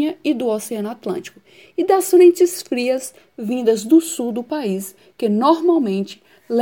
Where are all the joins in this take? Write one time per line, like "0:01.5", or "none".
none